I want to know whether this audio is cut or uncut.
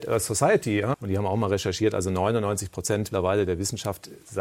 cut